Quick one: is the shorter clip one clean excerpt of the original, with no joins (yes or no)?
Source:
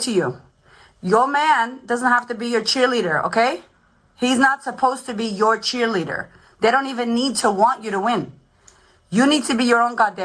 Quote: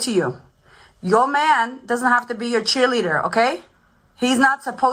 yes